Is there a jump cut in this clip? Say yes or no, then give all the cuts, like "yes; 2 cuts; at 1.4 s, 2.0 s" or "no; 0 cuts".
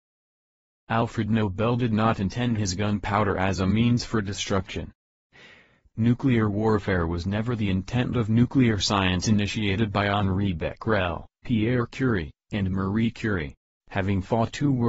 yes; 1 cut; at 13.8 s